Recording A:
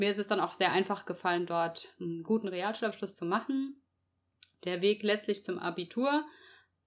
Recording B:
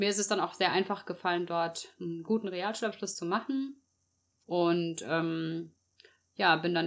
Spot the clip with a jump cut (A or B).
B